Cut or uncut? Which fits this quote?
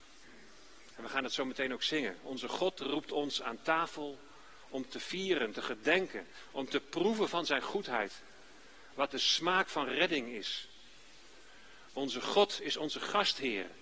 uncut